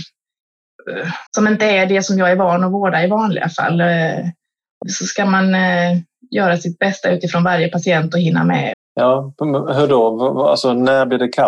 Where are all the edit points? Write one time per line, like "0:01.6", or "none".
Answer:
0:01.3
0:04.8
0:08.7